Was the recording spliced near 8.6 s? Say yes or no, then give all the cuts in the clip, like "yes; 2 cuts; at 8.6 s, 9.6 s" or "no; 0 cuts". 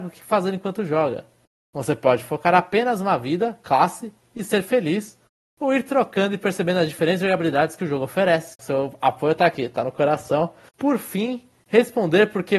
yes; 2 cuts; at 8.6 s, 10.7 s